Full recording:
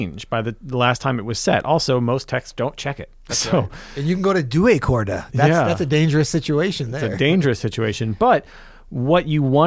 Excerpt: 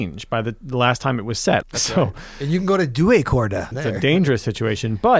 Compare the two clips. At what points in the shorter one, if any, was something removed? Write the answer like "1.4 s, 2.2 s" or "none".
1.6 s, 3.7 s